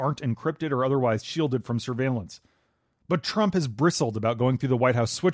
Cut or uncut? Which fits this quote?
uncut